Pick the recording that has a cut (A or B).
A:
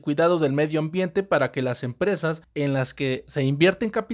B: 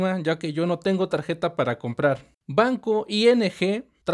B